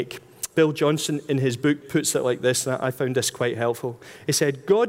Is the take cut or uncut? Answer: cut